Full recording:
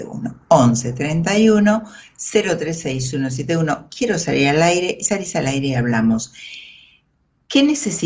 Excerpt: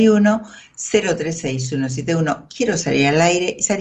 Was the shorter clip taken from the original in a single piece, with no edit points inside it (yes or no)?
yes